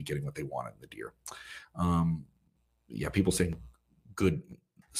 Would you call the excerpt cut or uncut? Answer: uncut